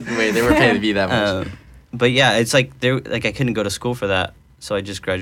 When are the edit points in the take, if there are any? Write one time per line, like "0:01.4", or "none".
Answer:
none